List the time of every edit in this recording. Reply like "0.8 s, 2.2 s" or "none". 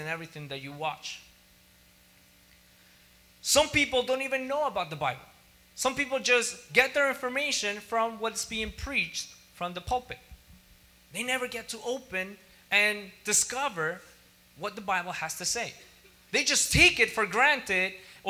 none